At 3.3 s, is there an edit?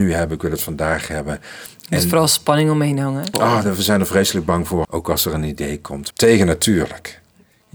yes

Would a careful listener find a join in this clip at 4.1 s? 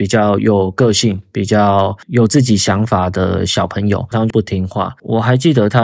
yes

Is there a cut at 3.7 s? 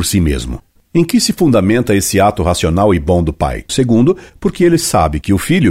yes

